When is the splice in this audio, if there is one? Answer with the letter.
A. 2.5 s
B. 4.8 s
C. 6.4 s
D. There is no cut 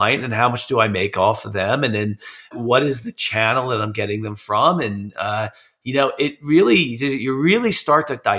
A